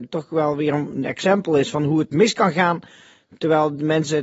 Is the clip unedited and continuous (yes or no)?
yes